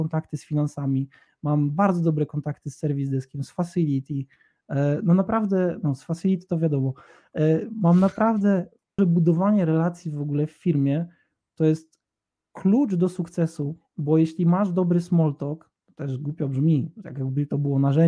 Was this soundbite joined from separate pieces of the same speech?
yes; 1 cut; at 9.0 s

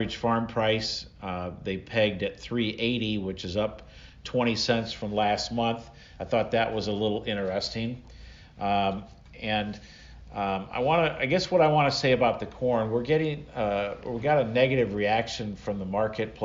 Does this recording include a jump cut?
no; 0 cuts

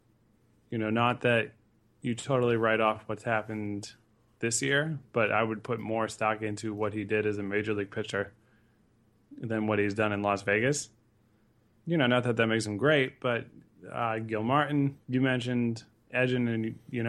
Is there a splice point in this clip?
yes; 2 cuts; at 11.7 s, 15.0 s

